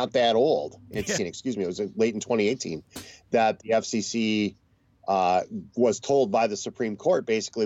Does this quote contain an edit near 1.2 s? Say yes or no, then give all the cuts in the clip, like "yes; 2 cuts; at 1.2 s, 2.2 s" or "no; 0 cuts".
yes; 1 cut; at 1.2 s